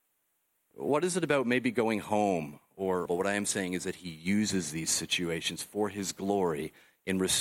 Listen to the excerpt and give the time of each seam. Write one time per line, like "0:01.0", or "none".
0:03.1